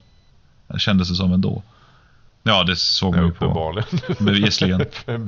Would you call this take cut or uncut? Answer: uncut